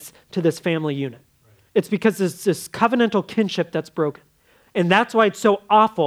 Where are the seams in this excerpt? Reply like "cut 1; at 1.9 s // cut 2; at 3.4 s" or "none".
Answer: cut 1; at 1.7 s